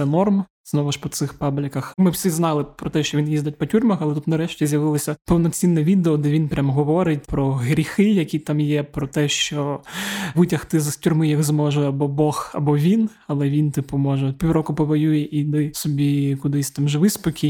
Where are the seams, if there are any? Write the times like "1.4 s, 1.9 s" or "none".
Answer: 1.9 s